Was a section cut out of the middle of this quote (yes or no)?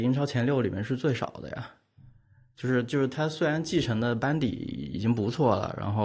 no